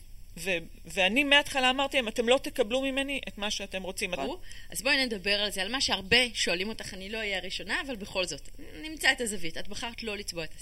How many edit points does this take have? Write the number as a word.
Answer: one